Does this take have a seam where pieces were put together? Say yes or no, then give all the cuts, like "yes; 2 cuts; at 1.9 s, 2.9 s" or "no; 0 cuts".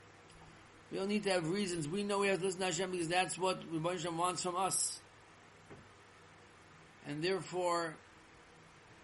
yes; 1 cut; at 6.9 s